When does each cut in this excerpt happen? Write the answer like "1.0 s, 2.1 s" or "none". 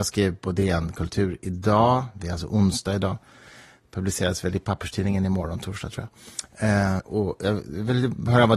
7.0 s